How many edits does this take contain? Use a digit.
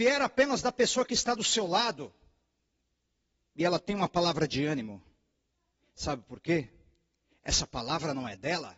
0